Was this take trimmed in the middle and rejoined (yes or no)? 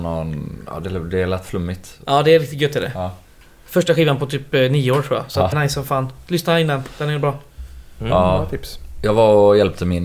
yes